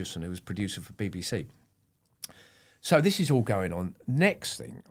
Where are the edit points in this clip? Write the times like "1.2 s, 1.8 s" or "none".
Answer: none